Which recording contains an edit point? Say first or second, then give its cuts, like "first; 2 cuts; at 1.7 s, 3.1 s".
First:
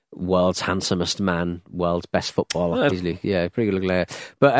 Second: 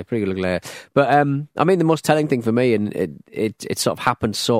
first; 1 cut; at 2.9 s